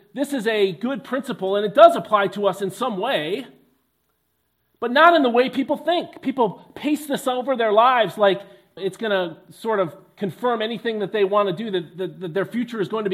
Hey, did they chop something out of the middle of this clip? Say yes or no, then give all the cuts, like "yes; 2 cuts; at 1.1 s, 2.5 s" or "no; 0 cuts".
yes; 1 cut; at 8.8 s